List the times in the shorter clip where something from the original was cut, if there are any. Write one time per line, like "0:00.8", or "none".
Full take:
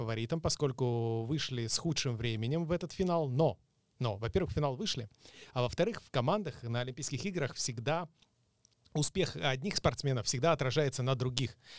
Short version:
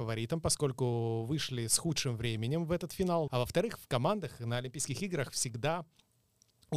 0:03.3